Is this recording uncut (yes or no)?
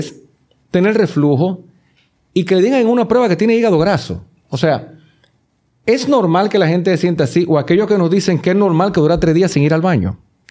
yes